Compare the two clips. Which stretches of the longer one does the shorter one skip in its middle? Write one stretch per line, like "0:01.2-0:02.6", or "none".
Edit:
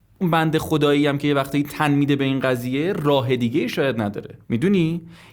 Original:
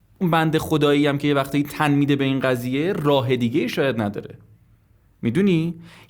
0:04.4-0:05.2